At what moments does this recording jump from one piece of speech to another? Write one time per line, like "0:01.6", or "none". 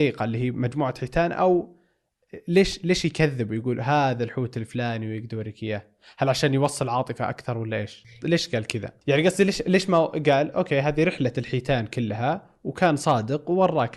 0:08.2